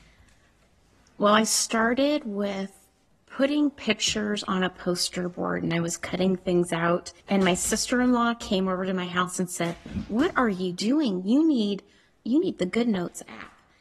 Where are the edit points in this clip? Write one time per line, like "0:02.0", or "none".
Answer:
0:07.2